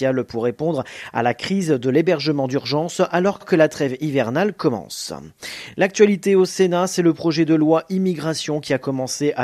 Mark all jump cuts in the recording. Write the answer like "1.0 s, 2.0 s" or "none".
none